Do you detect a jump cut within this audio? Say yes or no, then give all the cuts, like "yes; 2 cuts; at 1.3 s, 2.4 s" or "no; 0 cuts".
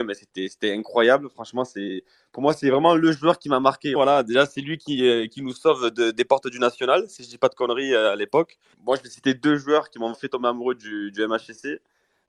yes; 3 cuts; at 4.0 s, 8.7 s, 10.1 s